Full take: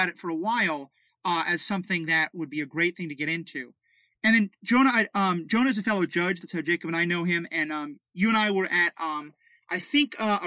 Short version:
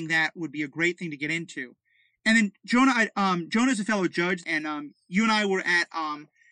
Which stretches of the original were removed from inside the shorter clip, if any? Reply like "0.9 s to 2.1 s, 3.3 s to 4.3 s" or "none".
6.4 s to 7.5 s